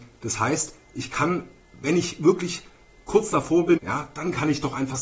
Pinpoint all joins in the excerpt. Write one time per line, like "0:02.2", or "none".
0:03.8